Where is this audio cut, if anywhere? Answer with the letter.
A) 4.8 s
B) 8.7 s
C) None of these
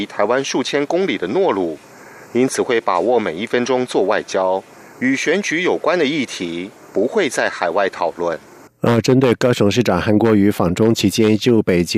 B